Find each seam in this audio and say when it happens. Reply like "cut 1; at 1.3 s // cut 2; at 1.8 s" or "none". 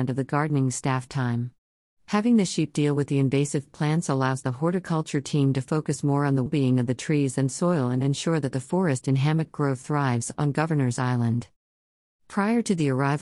cut 1; at 6.5 s